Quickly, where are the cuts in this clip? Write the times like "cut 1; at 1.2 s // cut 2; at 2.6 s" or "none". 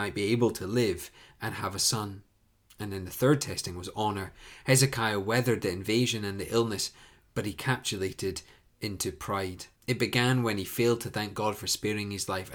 cut 1; at 9.8 s

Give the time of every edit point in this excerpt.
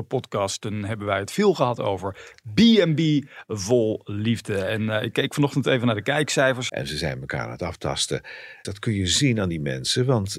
cut 1; at 6.7 s // cut 2; at 8.6 s

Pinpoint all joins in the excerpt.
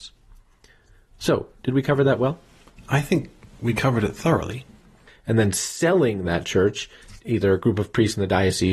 cut 1; at 5.1 s // cut 2; at 7.2 s

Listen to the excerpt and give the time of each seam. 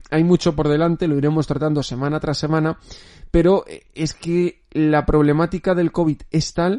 none

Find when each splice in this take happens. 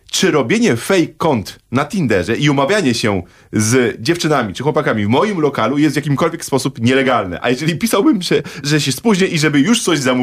cut 1; at 8.6 s

